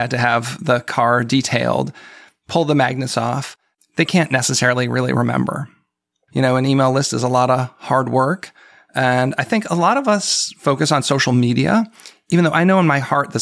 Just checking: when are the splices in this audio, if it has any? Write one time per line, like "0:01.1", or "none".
0:03.8
0:06.3